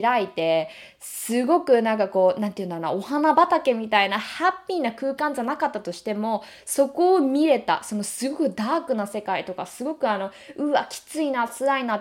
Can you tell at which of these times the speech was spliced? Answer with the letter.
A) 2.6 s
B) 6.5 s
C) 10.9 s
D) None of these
D